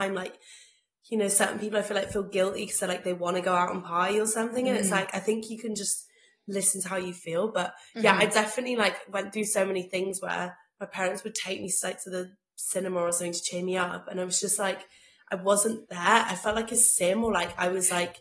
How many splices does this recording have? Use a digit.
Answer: 0